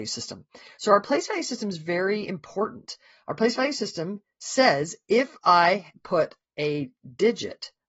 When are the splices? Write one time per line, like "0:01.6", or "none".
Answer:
none